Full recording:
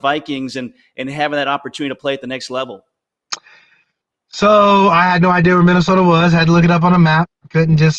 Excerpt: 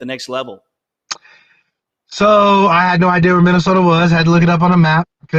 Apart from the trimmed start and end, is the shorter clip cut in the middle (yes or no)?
no